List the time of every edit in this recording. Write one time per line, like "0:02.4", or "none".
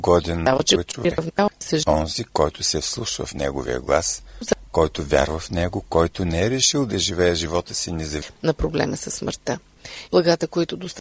0:10.1